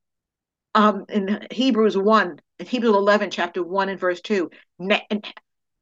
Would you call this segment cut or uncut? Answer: cut